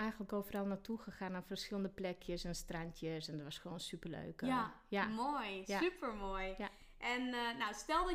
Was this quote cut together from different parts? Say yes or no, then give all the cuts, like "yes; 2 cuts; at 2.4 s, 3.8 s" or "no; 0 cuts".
no; 0 cuts